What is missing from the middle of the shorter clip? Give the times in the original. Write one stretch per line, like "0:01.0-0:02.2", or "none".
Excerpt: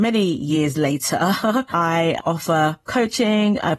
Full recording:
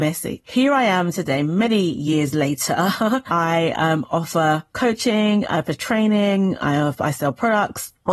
0:03.8-0:04.1